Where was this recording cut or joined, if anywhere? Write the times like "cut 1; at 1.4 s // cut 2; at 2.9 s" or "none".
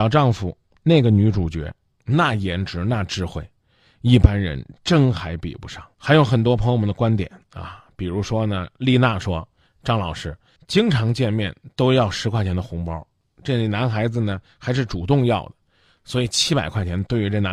cut 1; at 5.9 s